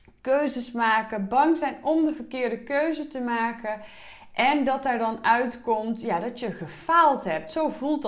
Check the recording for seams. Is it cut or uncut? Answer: uncut